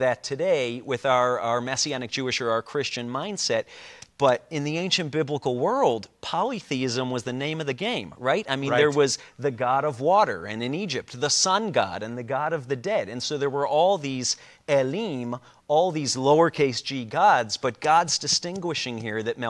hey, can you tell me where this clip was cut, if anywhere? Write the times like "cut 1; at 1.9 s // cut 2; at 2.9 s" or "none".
none